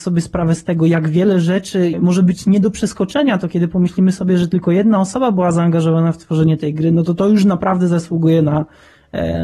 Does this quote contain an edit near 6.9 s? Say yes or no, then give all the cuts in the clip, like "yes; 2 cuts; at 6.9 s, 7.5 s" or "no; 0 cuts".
no; 0 cuts